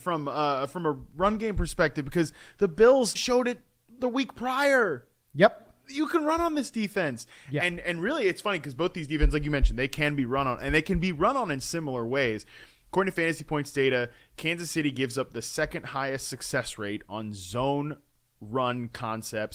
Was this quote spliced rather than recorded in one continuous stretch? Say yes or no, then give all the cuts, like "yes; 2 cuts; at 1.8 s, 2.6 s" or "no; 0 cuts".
yes; 1 cut; at 3.1 s